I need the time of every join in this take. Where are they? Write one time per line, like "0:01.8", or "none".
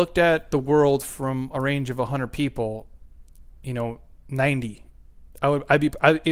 0:03.5